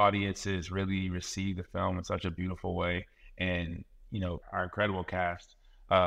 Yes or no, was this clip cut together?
yes